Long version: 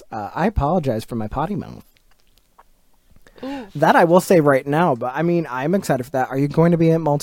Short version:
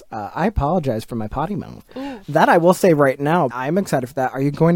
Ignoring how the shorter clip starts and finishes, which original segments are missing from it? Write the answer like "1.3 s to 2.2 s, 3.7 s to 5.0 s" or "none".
1.9 s to 3.3 s, 5.0 s to 5.5 s